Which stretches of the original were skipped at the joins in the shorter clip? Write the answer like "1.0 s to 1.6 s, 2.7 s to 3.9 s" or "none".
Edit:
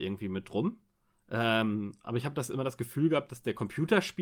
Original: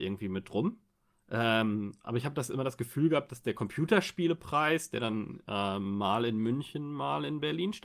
none